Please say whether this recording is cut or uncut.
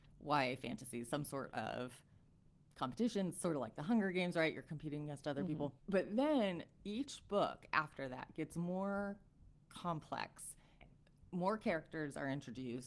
uncut